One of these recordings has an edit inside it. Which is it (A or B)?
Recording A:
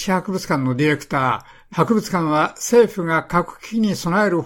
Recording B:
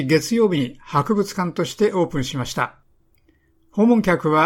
A